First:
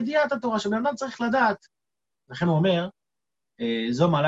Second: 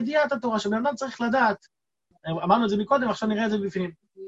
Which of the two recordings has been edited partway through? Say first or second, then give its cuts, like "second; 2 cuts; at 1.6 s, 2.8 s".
second; 1 cut; at 2.1 s